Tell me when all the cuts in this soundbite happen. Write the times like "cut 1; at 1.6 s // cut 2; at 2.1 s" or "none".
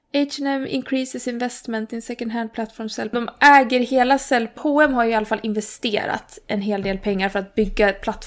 cut 1; at 3.1 s // cut 2; at 4.6 s